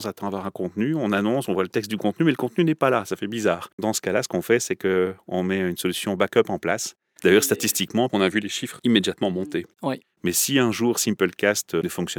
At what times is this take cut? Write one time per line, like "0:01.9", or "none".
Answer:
0:07.2
0:10.0